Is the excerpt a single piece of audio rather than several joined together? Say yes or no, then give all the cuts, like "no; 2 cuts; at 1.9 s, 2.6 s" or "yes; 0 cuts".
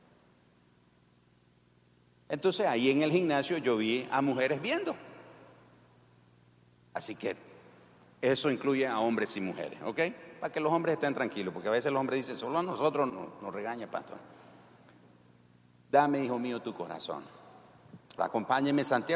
no; 2 cuts; at 13.1 s, 18.2 s